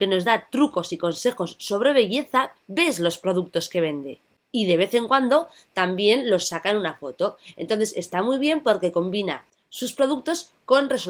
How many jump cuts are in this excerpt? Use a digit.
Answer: 1